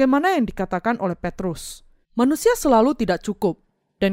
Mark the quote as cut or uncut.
cut